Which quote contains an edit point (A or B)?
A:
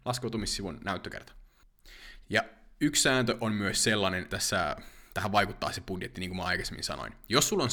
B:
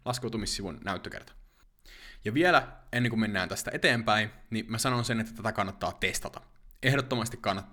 A